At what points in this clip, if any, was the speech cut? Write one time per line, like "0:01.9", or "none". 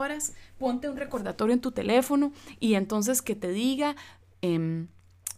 0:04.3